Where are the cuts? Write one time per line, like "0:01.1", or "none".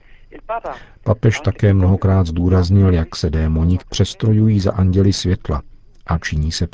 0:03.8